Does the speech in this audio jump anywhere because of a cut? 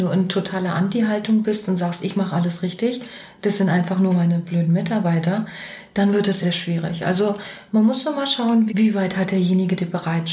yes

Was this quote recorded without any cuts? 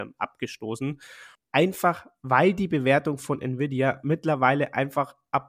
no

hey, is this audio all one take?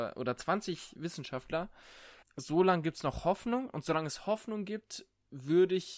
no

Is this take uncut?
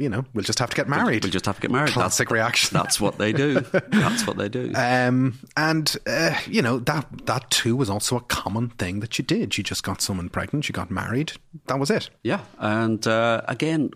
yes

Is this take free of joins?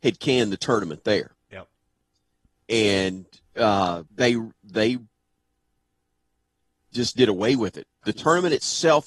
no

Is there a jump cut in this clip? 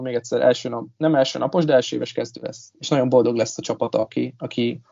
no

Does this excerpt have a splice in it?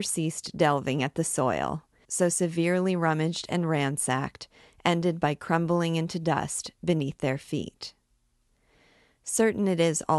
yes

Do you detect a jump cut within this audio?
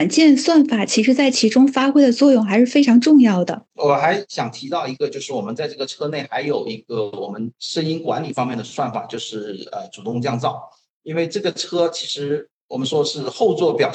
no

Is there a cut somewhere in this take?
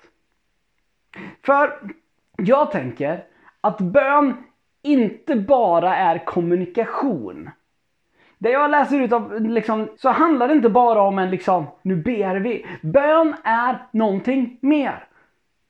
yes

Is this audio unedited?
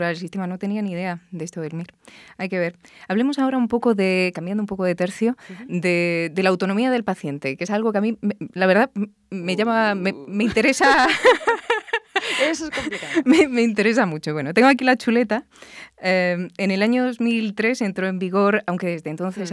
yes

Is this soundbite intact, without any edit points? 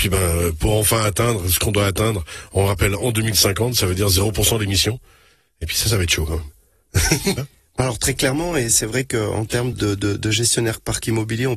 no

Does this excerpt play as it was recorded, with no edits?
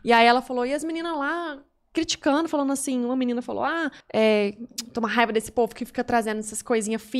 no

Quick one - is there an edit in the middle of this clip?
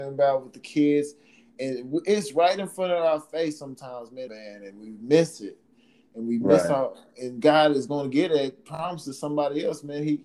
yes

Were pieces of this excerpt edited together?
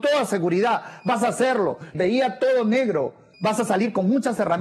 yes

